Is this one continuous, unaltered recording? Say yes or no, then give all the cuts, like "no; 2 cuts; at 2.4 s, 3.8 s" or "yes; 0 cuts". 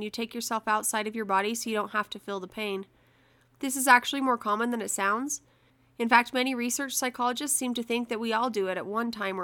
yes; 0 cuts